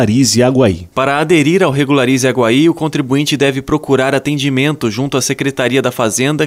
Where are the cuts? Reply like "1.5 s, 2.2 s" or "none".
0.9 s